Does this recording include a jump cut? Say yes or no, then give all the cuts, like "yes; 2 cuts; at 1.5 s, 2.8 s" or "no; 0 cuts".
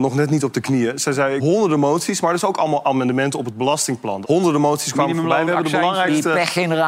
yes; 2 cuts; at 1.4 s, 4.2 s